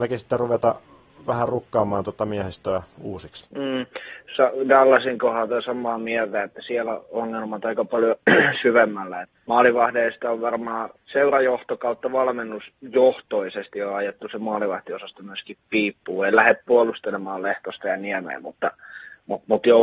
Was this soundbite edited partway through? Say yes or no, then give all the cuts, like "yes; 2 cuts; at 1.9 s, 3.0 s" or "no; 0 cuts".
no; 0 cuts